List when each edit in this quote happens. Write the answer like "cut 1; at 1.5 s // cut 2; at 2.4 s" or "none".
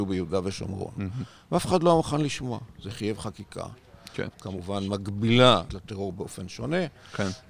cut 1; at 4.3 s // cut 2; at 5.7 s